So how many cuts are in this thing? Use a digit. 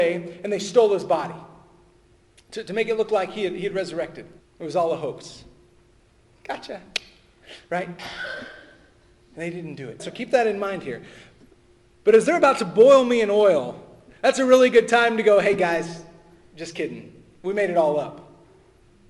2